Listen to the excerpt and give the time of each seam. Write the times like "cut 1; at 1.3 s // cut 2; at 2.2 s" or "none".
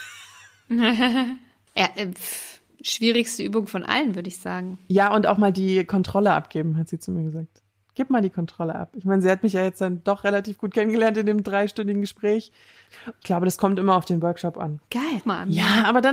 cut 1; at 13.1 s // cut 2; at 15.2 s